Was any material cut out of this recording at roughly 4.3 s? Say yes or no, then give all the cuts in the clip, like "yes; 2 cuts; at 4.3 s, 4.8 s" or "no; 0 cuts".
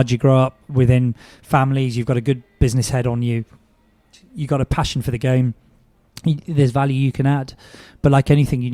no; 0 cuts